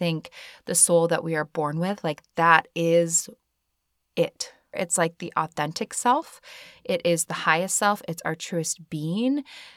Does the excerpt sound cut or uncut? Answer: cut